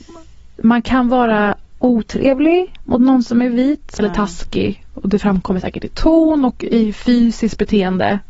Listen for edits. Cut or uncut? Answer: cut